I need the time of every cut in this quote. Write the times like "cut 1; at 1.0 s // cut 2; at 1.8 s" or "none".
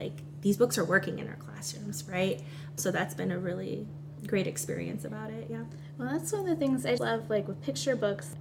cut 1; at 2.8 s // cut 2; at 7.0 s